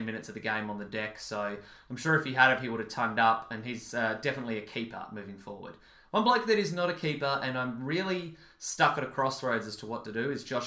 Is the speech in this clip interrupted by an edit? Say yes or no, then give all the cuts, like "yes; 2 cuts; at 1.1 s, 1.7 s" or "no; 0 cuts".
no; 0 cuts